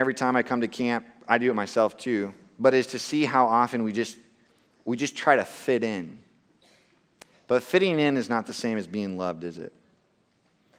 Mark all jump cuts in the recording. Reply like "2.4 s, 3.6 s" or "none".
none